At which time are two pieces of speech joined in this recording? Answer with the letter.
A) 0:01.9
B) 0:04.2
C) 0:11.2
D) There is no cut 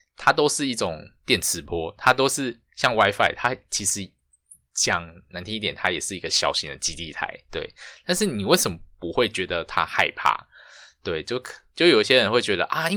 D